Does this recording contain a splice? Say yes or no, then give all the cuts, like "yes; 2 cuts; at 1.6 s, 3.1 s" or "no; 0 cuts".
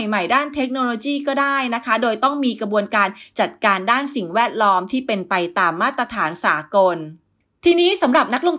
no; 0 cuts